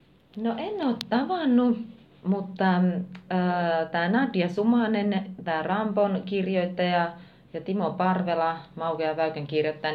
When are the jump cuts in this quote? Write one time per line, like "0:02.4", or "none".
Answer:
none